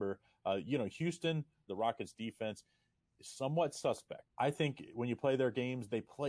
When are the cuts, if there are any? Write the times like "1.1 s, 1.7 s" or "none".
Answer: 1.7 s, 4.3 s